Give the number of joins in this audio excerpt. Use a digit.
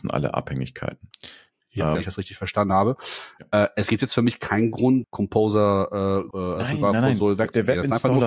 3